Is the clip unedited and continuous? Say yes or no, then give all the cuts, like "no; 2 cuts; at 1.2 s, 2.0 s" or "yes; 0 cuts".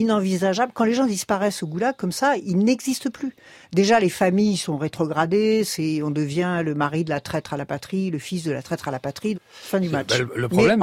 no; 1 cut; at 9.3 s